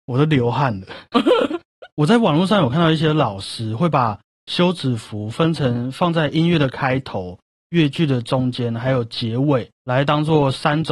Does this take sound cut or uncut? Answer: uncut